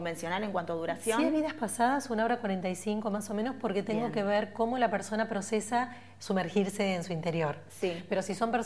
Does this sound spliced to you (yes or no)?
no